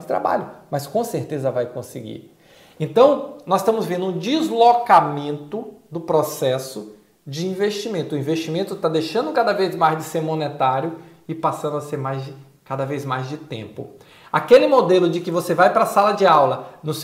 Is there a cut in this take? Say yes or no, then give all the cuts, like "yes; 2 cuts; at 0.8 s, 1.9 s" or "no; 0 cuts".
no; 0 cuts